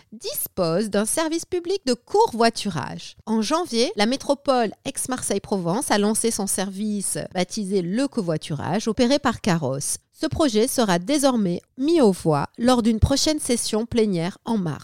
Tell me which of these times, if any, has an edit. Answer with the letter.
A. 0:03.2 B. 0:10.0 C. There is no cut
B